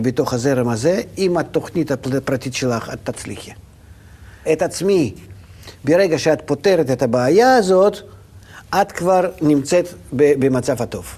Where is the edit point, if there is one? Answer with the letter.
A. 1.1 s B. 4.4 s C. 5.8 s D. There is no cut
B